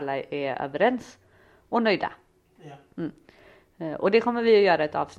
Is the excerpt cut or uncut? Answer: uncut